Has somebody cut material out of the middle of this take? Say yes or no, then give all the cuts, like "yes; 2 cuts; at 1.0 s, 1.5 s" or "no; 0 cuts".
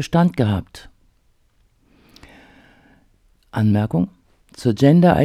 no; 0 cuts